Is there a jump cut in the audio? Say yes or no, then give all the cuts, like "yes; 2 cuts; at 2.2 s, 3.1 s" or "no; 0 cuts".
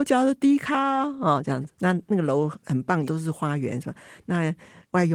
yes; 2 cuts; at 1.7 s, 3.0 s